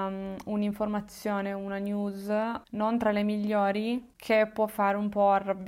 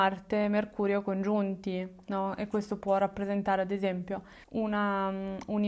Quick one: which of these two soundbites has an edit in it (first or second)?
second